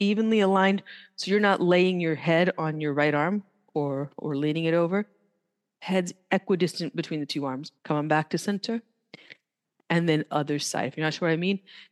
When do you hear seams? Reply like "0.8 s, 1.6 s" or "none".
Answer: 7.8 s